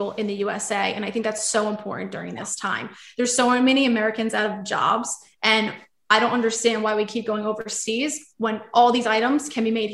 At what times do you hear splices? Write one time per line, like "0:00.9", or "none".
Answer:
none

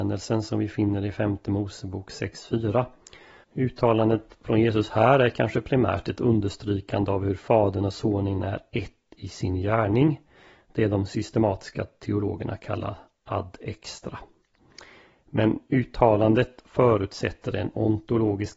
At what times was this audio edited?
0:03.4

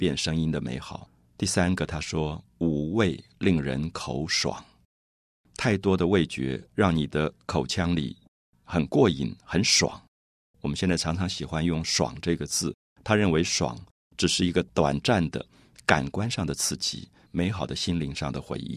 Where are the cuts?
0:12.9
0:17.3

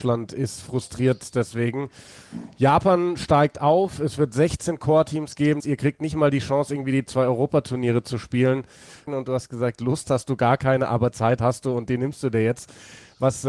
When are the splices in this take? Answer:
0:05.6
0:09.1

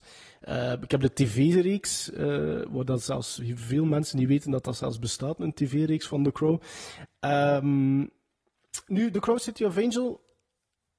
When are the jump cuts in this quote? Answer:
none

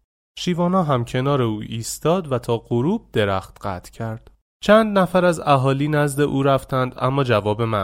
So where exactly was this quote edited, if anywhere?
0:04.5

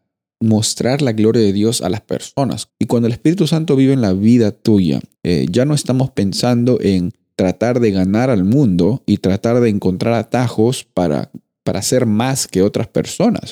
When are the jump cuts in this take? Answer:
0:02.7
0:05.1

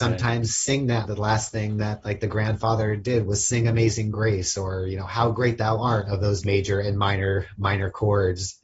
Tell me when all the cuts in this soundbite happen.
0:01.0
0:06.1

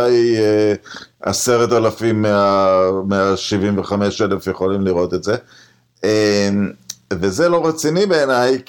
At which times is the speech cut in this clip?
none

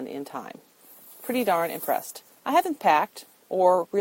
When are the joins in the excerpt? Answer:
none

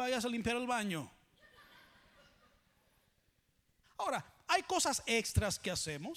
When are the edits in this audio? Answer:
0:03.8

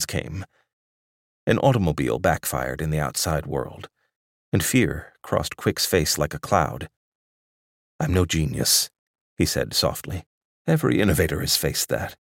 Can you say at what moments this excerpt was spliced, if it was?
0:10.5

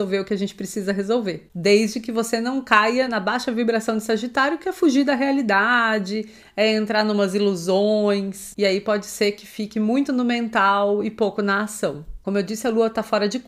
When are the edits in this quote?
0:03.1
0:12.2

